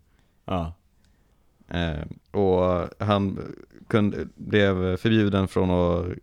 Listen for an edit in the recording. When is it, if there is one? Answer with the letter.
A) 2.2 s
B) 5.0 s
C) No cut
A